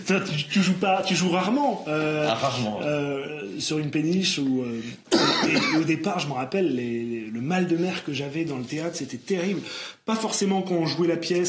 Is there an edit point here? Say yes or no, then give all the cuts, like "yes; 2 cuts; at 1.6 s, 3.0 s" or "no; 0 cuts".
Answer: no; 0 cuts